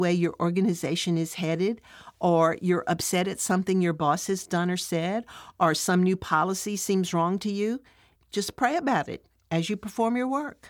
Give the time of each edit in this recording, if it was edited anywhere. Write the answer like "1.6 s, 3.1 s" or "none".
8.2 s